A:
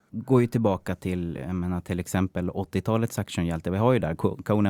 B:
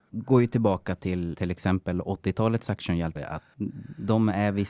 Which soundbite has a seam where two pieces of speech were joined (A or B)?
B